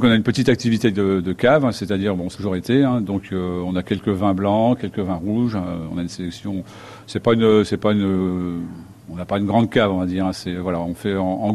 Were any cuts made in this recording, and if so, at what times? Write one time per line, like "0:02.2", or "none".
none